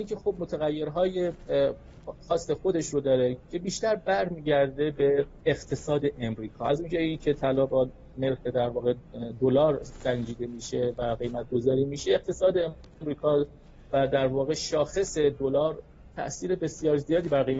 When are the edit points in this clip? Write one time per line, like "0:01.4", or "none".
0:05.4